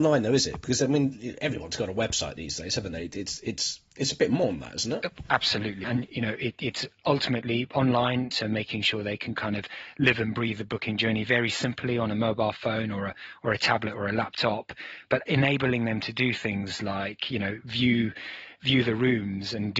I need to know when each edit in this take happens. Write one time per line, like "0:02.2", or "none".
0:05.8
0:08.3